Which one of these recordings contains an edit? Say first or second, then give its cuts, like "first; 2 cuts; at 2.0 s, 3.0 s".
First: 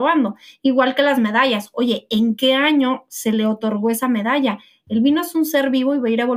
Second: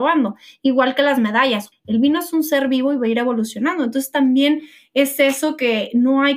second; 1 cut; at 1.7 s